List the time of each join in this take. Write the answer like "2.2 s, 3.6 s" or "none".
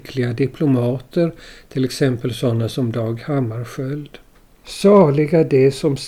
4.6 s